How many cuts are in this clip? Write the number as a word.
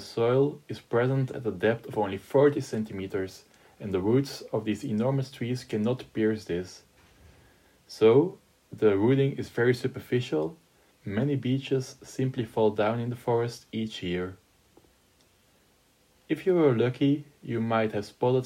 one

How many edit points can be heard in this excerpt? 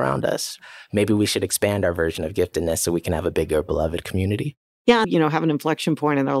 one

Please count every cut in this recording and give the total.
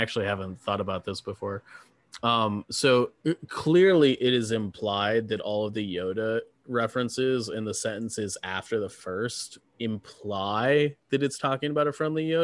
one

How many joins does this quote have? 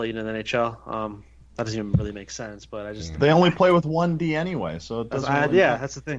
zero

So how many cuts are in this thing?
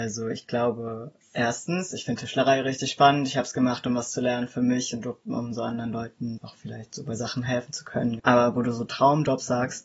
two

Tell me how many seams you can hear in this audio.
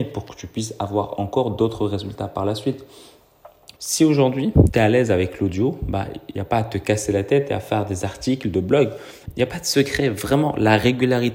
two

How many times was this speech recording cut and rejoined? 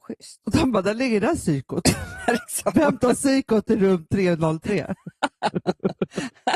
zero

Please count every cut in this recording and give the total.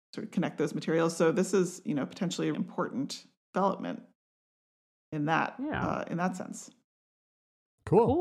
one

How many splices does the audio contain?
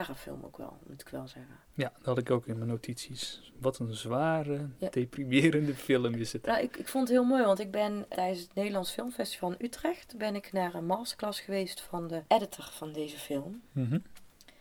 two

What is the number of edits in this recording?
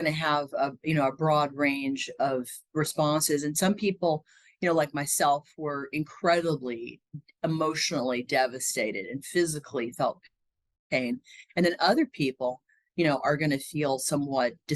zero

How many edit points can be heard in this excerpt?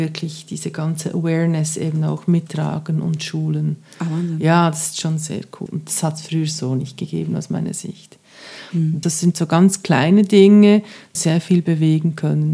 three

